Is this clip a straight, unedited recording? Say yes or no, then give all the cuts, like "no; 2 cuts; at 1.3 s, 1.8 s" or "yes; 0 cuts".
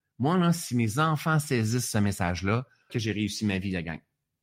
no; 1 cut; at 2.9 s